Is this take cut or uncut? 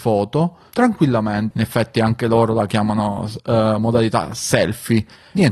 cut